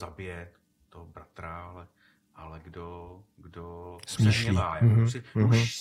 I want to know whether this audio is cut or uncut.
uncut